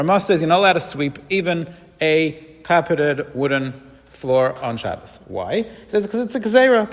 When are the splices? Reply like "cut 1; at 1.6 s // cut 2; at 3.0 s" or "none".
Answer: none